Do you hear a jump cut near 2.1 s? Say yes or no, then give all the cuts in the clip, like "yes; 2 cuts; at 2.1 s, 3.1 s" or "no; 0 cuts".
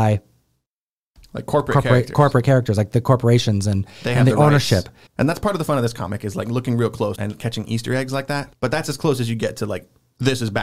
no; 3 cuts; at 5.1 s, 7.2 s, 8.5 s